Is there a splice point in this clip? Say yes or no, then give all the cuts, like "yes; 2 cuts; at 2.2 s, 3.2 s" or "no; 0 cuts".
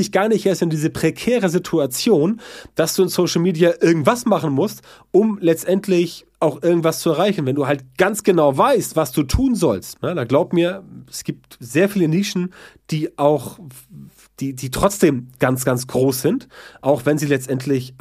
yes; 1 cut; at 10.0 s